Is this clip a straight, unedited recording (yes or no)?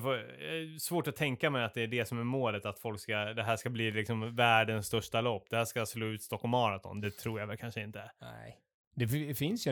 yes